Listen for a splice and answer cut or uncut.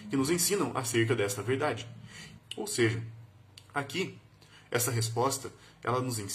cut